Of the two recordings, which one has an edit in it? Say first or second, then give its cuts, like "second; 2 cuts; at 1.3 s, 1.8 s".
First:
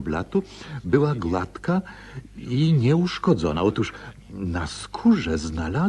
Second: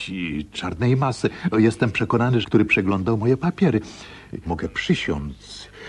second; 2 cuts; at 2.4 s, 4.5 s